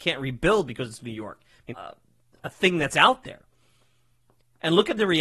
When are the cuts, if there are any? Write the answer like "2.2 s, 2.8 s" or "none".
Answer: 1.7 s